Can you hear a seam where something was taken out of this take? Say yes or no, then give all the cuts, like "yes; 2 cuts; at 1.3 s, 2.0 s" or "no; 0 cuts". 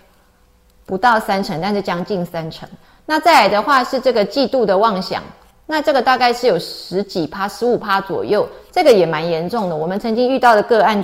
no; 0 cuts